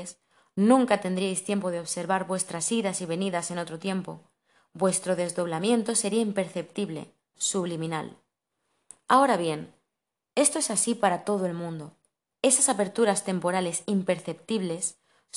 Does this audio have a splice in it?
yes; 2 cuts; at 7.3 s, 12.4 s

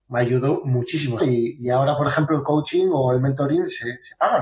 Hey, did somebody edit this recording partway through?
yes; 1 cut; at 1.2 s

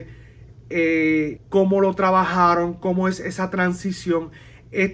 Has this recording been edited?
yes; 1 cut; at 1.4 s

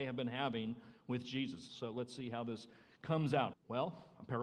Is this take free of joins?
no; 2 cuts; at 1.7 s, 3.5 s

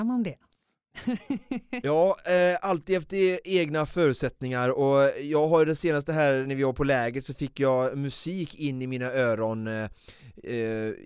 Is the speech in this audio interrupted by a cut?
no; 0 cuts

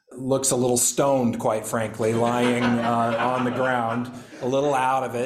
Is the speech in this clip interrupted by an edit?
no; 0 cuts

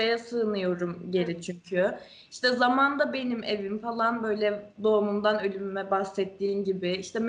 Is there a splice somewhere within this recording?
no; 0 cuts

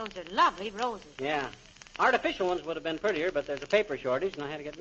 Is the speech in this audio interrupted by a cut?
no; 0 cuts

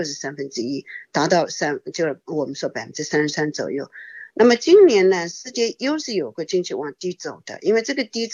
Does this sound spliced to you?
no; 0 cuts

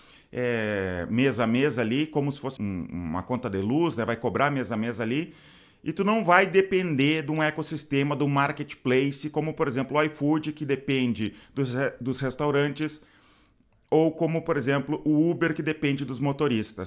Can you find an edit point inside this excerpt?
yes; 1 cut; at 2.6 s

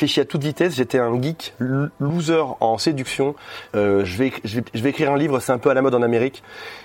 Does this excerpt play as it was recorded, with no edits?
no; 1 cut; at 3.7 s

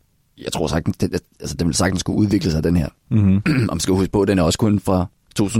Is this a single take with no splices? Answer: yes; 0 cuts

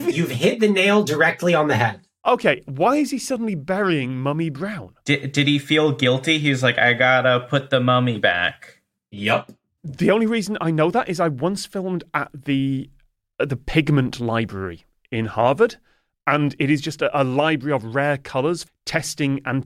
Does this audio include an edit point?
yes; 2 cuts; at 9.8 s, 18.7 s

